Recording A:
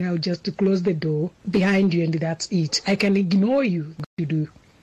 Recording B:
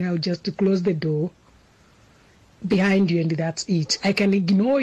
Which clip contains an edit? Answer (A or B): A